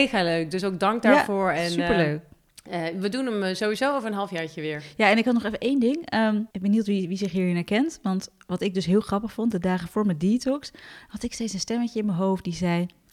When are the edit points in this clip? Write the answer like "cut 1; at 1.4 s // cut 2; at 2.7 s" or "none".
cut 1; at 6.5 s